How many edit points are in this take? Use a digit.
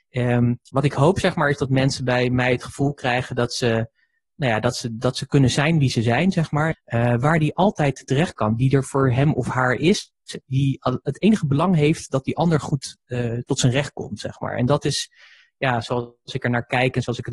1